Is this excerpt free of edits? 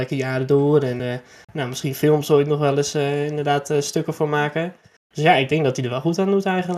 yes; 0 cuts

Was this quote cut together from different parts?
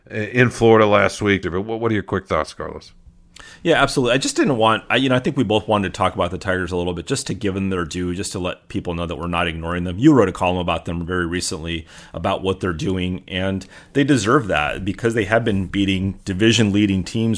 yes; 1 cut; at 1.4 s

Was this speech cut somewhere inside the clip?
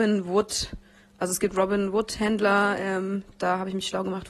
no; 0 cuts

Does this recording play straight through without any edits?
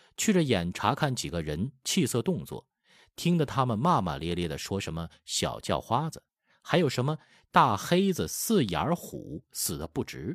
yes; 0 cuts

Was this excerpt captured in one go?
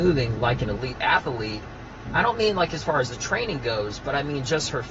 yes; 0 cuts

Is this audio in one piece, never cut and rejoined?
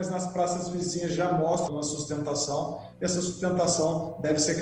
no; 1 cut; at 1.7 s

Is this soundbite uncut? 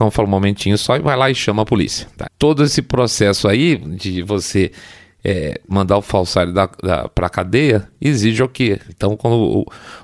no; 3 cuts; at 2.2 s, 5.7 s, 8.9 s

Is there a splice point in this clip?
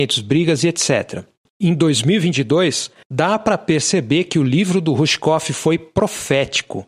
yes; 2 cuts; at 1.5 s, 3.0 s

